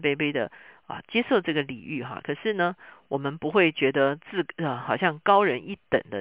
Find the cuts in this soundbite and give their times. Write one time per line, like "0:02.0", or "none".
none

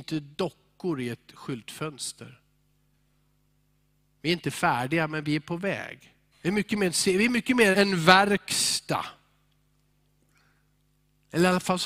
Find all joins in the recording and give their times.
0:06.3
0:07.7

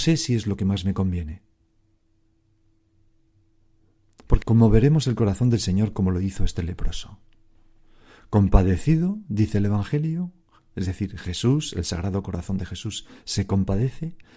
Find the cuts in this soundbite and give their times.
0:04.4

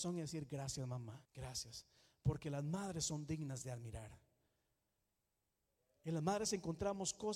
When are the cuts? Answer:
0:01.2

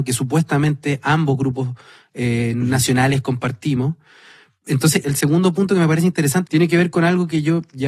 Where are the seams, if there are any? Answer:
0:05.0
0:06.5

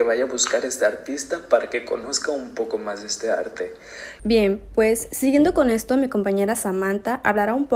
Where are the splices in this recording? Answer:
0:04.2

